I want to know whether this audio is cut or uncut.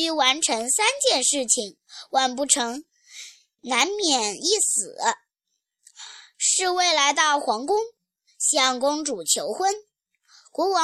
uncut